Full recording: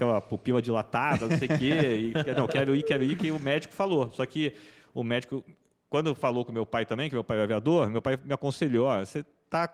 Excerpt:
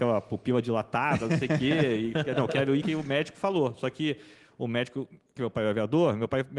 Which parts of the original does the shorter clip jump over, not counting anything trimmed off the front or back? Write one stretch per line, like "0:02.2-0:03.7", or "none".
0:02.8-0:03.2
0:05.7-0:07.1